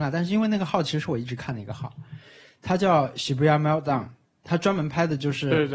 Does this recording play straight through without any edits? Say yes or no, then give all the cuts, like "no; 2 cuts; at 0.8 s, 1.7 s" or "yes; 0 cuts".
yes; 0 cuts